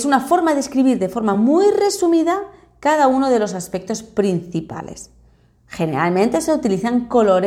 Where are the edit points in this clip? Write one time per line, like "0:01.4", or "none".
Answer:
none